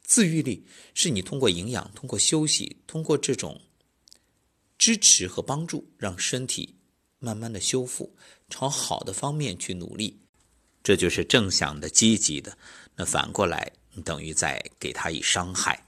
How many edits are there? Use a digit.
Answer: 0